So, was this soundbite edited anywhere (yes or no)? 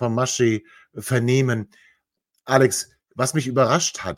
no